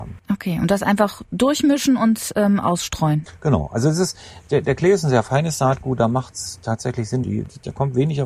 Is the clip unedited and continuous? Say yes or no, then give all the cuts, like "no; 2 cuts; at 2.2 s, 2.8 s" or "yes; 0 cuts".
no; 1 cut; at 7.2 s